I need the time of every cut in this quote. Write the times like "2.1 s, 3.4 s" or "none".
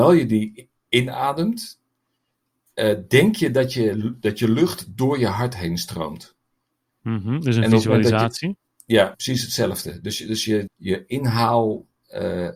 9.1 s, 10.7 s